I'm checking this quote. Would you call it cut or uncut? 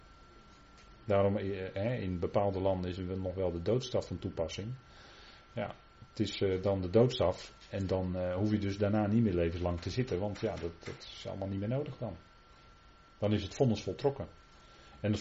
uncut